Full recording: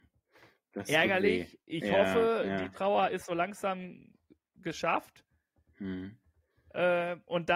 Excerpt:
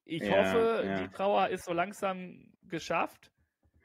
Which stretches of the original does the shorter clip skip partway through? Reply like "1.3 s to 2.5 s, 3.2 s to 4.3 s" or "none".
4.2 s to 4.5 s